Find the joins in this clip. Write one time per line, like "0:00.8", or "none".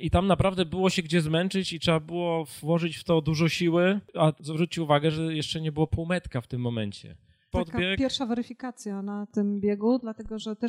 0:07.5